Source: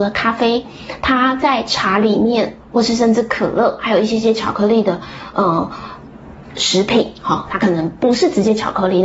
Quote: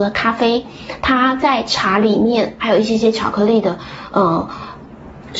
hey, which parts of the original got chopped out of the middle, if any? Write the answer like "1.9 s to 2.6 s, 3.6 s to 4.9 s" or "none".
2.6 s to 3.8 s

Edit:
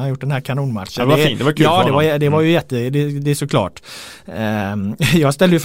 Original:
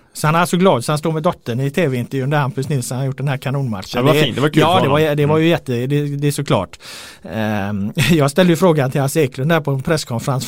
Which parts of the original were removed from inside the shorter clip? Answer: none

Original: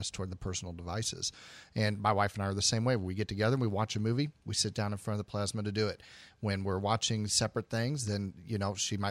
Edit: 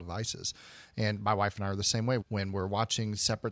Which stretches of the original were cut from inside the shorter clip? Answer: 3.0 s to 6.3 s

